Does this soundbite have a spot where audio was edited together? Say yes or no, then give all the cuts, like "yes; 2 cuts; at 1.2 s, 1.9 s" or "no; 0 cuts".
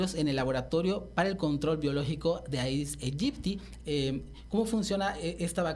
yes; 1 cut; at 3.8 s